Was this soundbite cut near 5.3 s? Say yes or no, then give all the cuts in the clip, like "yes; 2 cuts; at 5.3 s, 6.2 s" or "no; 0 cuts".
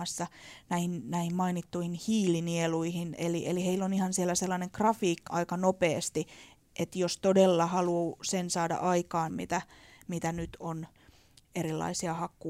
yes; 2 cuts; at 5.3 s, 9.3 s